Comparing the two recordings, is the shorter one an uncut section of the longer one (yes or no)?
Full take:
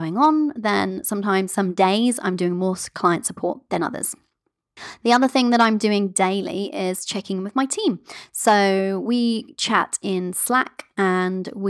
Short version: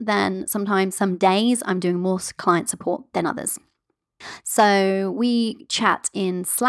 no